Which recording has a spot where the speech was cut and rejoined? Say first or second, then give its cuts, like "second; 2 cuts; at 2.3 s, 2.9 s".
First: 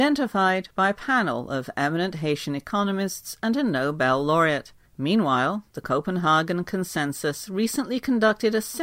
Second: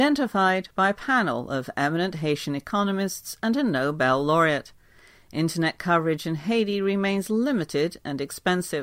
first; 1 cut; at 4.8 s